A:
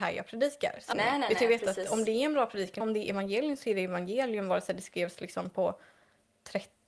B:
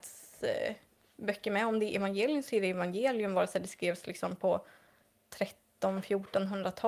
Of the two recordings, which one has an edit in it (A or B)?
A